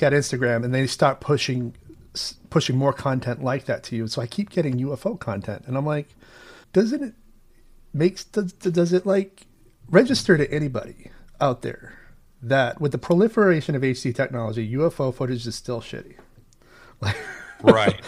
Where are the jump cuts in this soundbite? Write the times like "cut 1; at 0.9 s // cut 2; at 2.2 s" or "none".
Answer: cut 1; at 6.6 s